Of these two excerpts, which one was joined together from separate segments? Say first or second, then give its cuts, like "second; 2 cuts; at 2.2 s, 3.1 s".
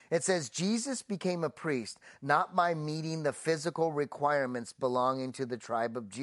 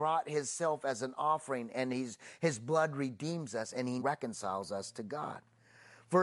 second; 1 cut; at 4.0 s